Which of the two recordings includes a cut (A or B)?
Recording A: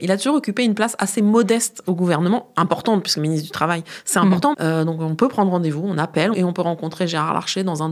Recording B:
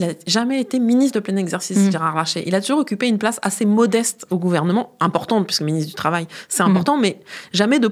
A